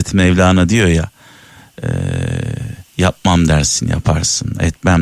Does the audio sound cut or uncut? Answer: cut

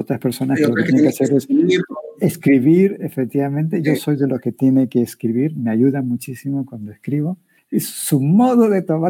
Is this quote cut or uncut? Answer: cut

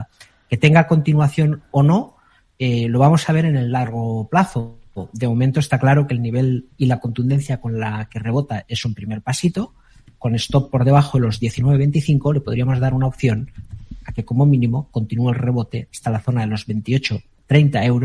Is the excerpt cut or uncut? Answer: uncut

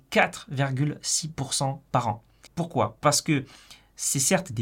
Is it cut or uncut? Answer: cut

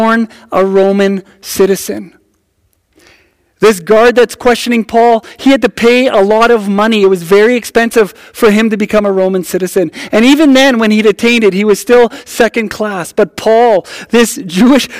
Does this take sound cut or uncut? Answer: uncut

